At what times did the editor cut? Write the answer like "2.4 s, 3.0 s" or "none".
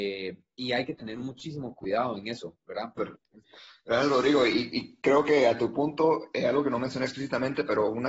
3.0 s